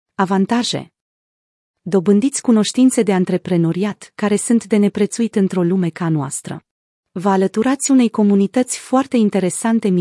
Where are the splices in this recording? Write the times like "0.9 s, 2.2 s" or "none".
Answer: 6.9 s